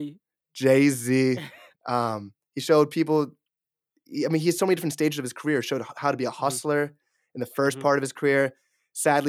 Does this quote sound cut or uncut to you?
cut